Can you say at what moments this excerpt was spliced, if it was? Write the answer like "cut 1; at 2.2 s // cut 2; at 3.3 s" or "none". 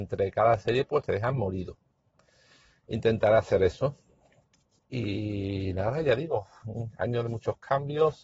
none